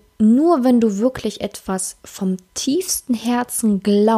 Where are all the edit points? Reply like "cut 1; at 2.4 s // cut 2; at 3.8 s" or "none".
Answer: none